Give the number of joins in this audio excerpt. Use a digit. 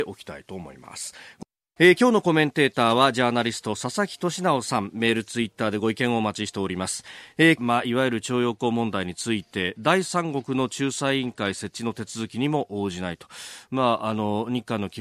2